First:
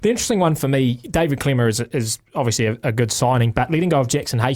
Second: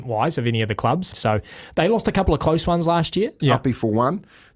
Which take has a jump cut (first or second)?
second